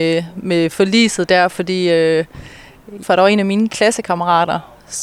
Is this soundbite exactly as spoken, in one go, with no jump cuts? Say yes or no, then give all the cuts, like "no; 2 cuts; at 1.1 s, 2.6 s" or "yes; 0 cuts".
no; 1 cut; at 3.0 s